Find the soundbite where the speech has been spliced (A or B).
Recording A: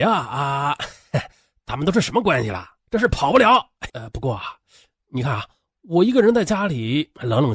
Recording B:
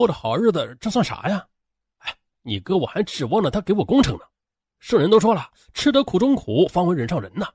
A